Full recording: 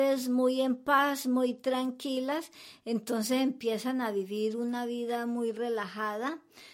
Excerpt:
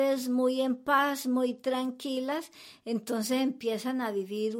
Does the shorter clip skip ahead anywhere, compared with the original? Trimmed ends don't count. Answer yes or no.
no